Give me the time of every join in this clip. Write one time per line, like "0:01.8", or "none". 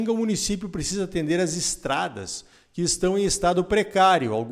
none